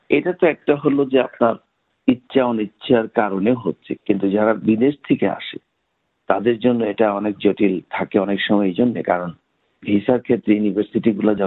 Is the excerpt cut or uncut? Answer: cut